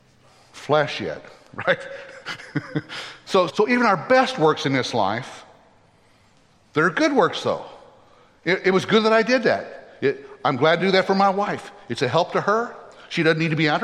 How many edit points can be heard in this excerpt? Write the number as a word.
one